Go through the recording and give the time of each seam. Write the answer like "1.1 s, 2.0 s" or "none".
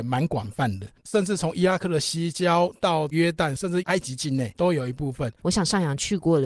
1.0 s, 3.6 s, 5.4 s